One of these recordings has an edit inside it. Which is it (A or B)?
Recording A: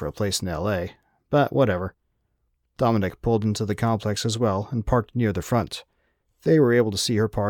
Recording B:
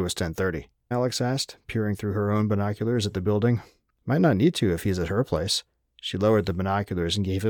B